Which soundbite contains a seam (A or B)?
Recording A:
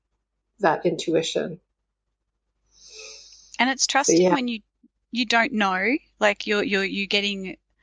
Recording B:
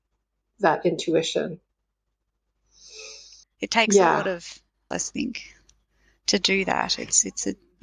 B